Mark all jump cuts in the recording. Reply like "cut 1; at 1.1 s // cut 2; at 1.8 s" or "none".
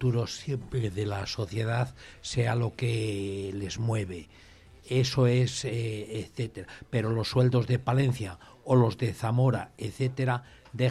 none